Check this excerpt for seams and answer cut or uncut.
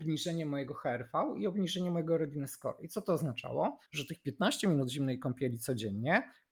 cut